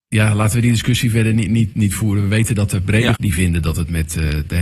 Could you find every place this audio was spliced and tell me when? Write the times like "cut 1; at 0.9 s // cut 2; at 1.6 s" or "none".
cut 1; at 3.1 s